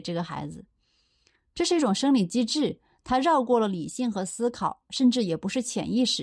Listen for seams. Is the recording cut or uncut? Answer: uncut